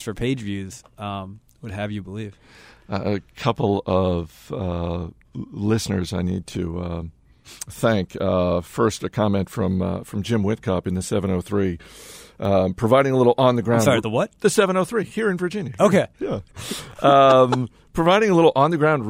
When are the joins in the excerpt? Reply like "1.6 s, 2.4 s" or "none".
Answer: 14.0 s, 16.5 s